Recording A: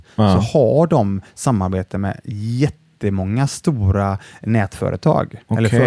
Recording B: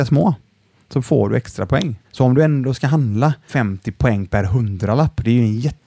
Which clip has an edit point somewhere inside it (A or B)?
B